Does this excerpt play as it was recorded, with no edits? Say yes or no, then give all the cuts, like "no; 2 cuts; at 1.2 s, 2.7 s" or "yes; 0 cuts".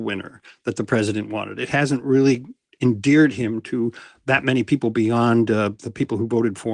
yes; 0 cuts